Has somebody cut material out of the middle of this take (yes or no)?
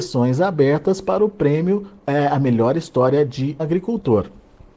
yes